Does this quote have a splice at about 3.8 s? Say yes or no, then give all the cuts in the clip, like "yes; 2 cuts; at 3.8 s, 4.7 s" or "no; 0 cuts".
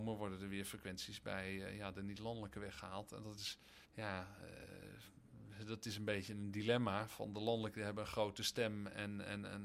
yes; 1 cut; at 3.8 s